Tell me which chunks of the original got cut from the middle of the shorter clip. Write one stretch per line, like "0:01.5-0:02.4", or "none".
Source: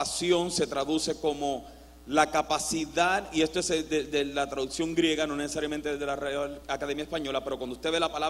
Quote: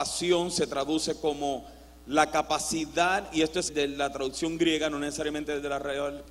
0:03.7-0:04.0